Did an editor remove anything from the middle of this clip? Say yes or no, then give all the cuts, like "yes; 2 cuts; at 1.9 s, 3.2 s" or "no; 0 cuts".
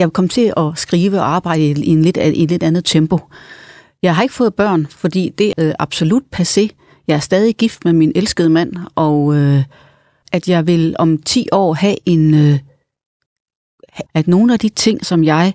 yes; 3 cuts; at 5.5 s, 10.2 s, 14.1 s